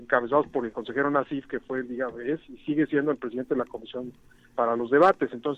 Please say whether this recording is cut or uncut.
cut